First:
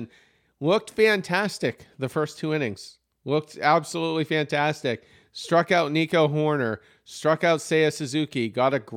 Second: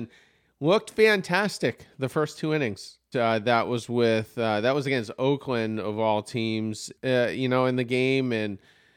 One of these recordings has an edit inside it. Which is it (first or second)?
second